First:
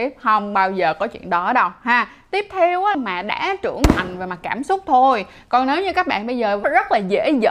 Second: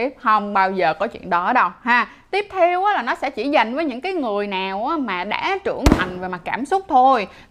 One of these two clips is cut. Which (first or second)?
first